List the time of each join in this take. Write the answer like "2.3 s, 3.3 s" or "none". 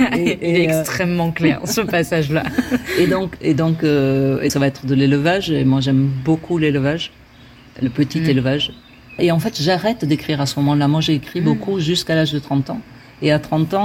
4.5 s, 9.2 s